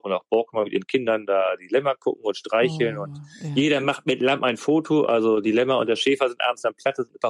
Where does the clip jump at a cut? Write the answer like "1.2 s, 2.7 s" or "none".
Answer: none